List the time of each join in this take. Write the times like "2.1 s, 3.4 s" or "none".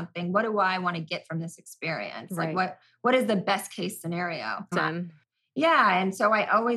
4.7 s